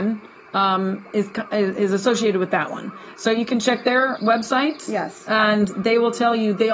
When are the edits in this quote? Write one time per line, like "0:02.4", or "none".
0:04.2